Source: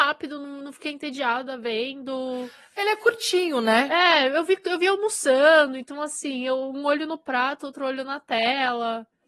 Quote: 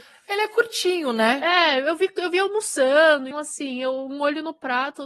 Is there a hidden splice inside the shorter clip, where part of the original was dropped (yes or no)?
yes